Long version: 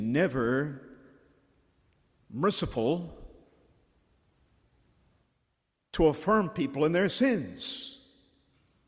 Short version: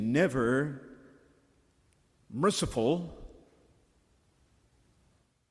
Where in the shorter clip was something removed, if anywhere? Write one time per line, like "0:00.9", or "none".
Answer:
none